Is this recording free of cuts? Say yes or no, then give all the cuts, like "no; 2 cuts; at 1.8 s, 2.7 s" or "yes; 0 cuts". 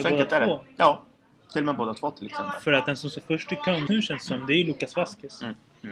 no; 1 cut; at 3.9 s